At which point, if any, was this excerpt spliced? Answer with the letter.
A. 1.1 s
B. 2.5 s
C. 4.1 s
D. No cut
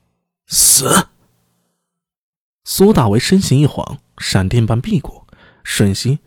D